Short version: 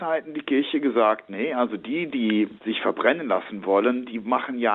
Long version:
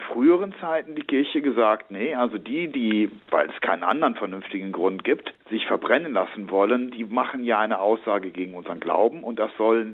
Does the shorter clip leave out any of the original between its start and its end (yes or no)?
yes